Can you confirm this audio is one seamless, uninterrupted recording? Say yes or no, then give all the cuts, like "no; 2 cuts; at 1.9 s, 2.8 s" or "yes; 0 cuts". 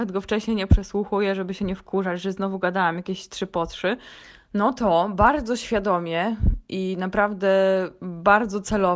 yes; 0 cuts